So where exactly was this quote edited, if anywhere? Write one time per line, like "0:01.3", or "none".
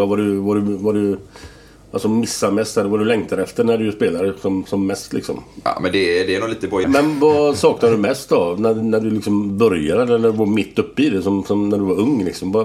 0:04.6
0:06.8